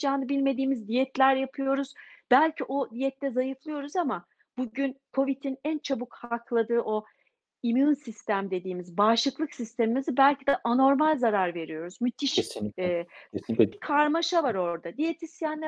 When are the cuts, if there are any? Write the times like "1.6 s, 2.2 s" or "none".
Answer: 13.7 s